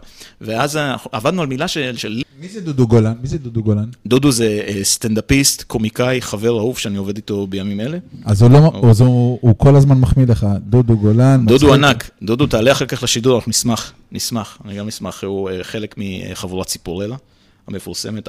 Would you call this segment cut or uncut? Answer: cut